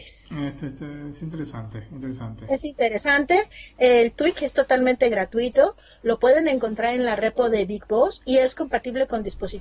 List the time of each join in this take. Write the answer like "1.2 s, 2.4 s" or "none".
none

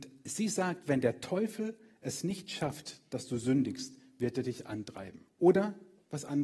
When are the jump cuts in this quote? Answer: 5.4 s

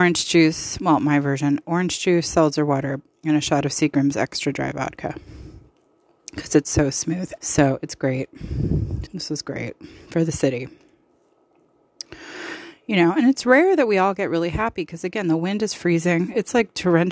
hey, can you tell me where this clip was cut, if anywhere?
7.4 s, 9.1 s

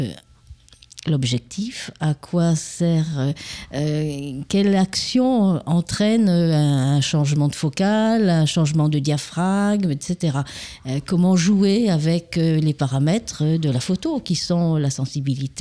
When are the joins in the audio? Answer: none

